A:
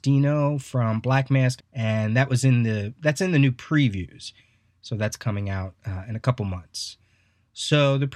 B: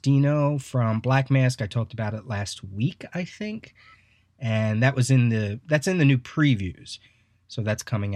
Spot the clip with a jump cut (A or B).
A